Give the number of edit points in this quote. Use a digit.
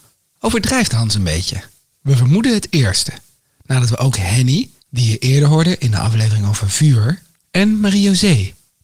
0